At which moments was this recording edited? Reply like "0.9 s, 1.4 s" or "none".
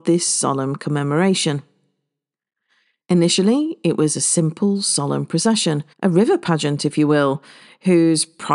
3.0 s, 5.9 s